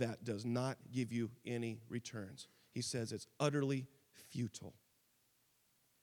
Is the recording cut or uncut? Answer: uncut